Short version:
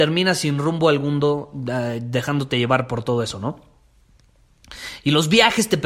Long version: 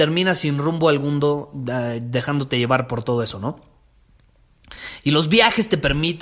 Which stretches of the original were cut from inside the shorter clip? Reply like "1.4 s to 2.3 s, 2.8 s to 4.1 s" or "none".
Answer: none